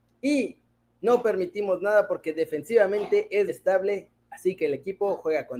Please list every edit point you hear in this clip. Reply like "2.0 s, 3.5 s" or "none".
3.5 s